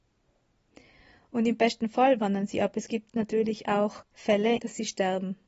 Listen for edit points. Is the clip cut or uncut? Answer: cut